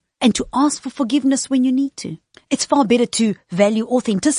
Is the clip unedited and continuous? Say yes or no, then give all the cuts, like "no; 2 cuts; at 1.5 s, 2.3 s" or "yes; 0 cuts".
no; 1 cut; at 2.3 s